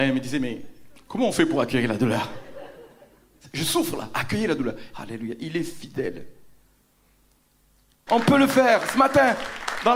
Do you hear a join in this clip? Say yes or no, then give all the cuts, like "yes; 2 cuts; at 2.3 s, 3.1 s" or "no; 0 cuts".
yes; 2 cuts; at 4.9 s, 8.1 s